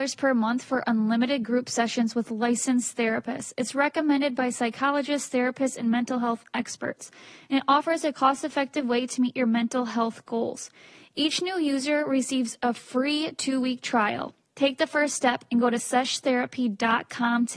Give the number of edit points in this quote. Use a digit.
0